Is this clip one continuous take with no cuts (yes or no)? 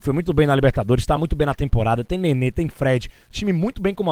yes